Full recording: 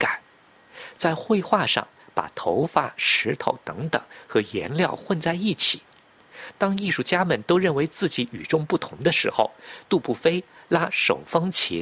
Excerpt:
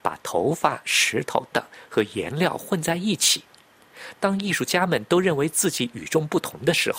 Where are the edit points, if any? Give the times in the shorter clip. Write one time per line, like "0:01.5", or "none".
0:01.5